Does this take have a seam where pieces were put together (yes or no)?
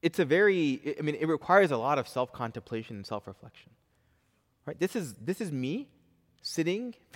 no